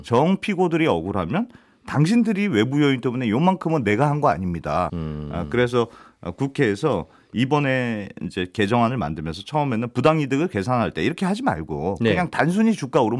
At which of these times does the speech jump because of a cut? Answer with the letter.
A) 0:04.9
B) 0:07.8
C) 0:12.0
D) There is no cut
A